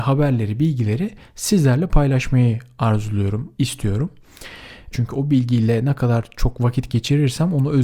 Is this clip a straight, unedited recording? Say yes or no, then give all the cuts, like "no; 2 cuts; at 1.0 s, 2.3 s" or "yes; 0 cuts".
no; 2 cuts; at 3.6 s, 4.9 s